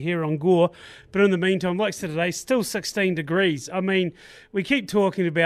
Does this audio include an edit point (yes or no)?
no